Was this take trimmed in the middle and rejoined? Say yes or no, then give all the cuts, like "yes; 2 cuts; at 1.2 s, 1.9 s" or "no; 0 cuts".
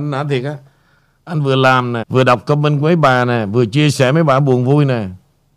yes; 1 cut; at 2.0 s